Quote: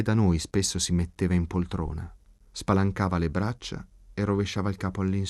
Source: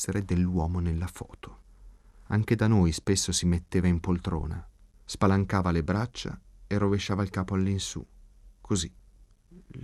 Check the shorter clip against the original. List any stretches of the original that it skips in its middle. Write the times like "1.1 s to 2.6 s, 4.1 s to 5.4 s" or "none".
none